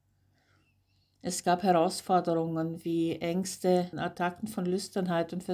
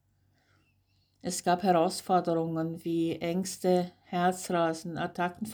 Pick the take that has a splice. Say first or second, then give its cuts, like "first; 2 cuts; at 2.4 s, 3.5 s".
first; 1 cut; at 3.9 s